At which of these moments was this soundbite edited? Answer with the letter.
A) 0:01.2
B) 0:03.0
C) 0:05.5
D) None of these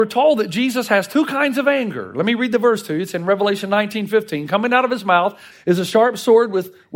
C